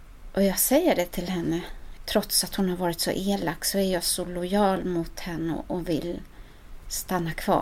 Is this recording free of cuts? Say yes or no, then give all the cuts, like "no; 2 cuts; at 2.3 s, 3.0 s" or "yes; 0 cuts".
no; 1 cut; at 2.0 s